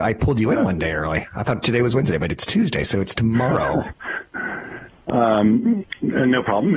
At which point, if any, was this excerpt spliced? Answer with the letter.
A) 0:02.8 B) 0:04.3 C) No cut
B